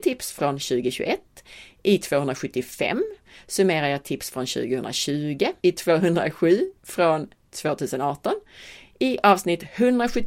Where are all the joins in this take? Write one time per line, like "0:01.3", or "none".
0:05.6